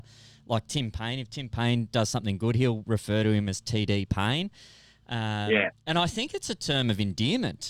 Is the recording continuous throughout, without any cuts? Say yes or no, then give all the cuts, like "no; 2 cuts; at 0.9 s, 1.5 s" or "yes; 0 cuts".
yes; 0 cuts